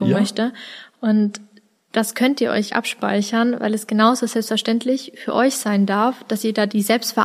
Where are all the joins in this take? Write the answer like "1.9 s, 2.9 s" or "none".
2.7 s

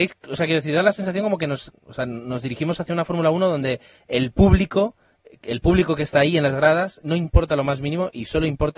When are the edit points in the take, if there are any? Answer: 1.7 s, 7.0 s

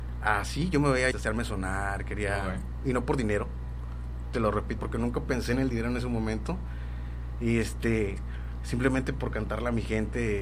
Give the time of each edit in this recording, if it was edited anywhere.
1.1 s, 4.8 s

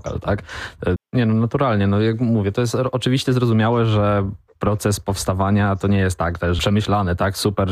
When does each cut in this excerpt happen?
1.0 s, 6.6 s

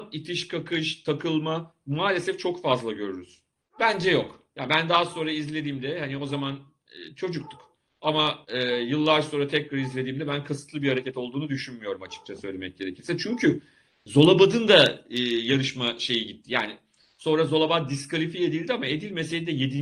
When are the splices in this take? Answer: 3.7 s

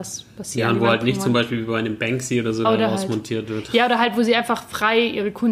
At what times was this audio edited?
2.6 s

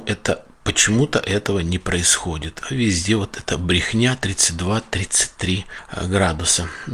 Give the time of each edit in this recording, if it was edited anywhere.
none

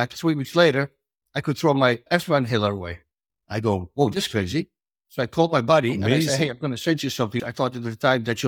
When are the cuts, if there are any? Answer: 7.4 s

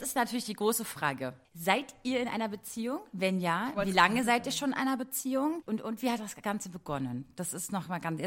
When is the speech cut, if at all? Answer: 1.4 s

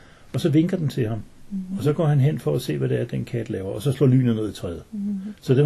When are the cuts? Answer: none

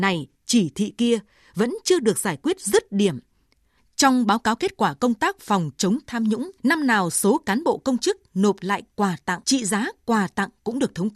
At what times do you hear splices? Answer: 3.8 s, 6.6 s, 9.4 s

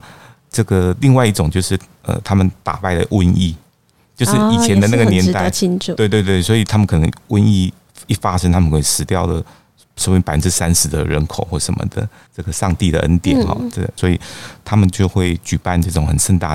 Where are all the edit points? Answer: 12.3 s, 14.0 s

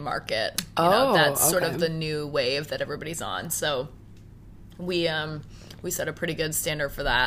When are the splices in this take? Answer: none

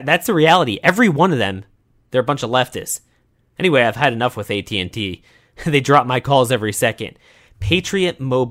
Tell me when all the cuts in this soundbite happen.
7.5 s

